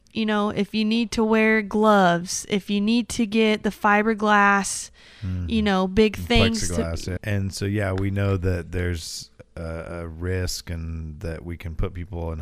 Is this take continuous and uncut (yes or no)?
no